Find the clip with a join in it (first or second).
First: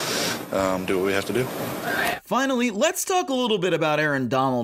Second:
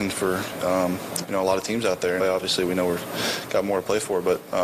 second